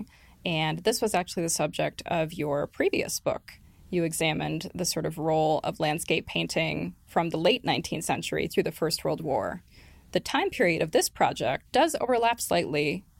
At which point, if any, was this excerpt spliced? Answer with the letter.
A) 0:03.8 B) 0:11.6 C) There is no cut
B